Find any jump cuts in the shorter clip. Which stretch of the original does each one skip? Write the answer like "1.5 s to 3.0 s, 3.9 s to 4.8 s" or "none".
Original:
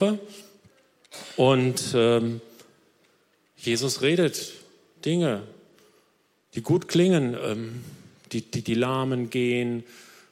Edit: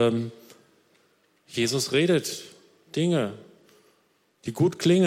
none